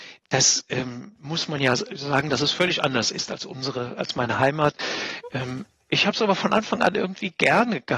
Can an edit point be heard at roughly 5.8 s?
no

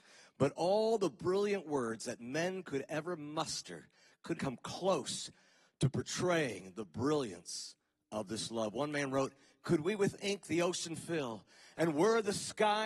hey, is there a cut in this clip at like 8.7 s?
no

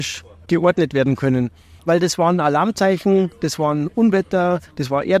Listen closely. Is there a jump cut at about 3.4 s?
no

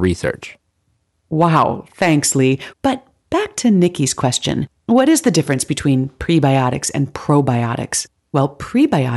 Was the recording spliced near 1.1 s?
no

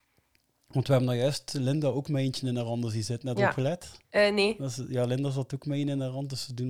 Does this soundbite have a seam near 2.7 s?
no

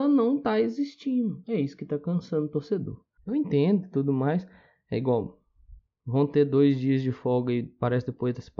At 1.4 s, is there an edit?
yes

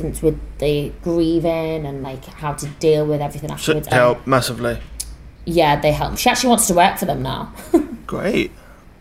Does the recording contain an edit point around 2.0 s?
no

